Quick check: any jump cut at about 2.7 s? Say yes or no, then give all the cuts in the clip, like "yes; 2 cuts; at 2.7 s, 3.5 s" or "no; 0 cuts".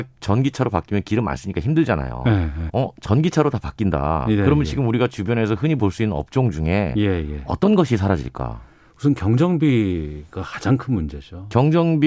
yes; 1 cut; at 2.7 s